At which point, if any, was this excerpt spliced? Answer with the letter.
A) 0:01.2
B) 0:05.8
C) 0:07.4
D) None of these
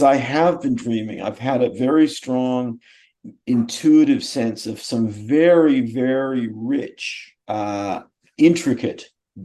C